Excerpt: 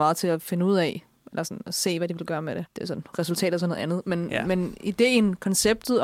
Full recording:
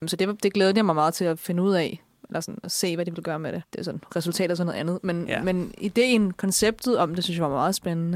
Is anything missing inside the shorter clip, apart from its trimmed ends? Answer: no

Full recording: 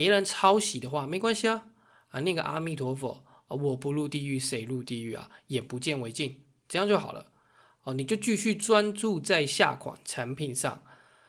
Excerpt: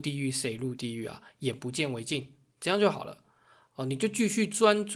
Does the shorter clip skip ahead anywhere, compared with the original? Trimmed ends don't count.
no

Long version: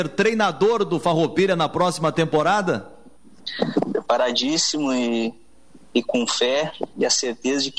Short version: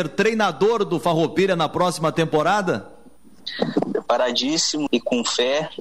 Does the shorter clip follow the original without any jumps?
no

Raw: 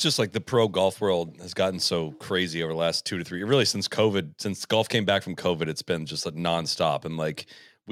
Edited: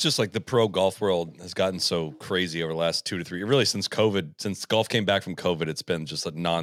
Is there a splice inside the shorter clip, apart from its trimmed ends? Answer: no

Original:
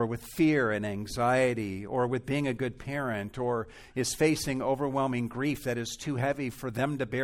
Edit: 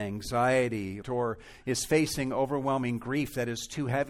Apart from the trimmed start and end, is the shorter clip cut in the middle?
yes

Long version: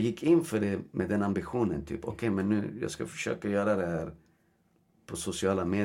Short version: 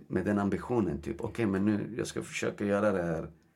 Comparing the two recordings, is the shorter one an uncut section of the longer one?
yes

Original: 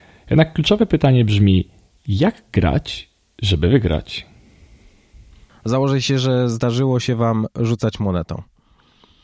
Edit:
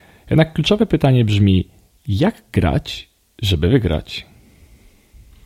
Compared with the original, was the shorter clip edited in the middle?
no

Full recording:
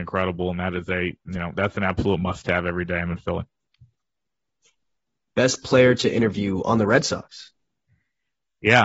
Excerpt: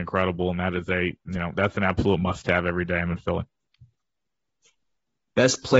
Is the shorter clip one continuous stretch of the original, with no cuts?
yes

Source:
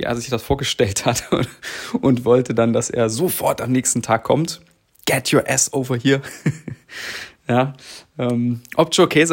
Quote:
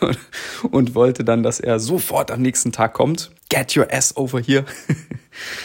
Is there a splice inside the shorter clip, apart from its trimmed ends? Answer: yes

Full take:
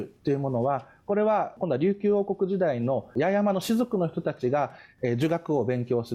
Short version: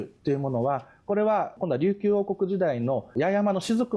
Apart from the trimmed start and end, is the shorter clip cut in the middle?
no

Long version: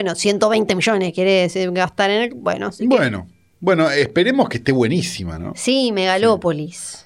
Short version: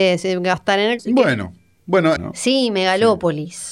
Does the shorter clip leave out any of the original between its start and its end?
yes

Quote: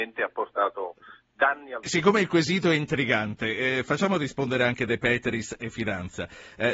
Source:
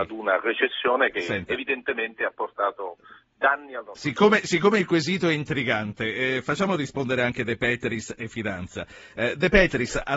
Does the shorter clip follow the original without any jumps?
no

